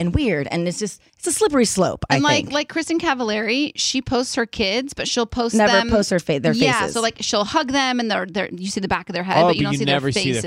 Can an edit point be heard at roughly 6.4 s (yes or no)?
no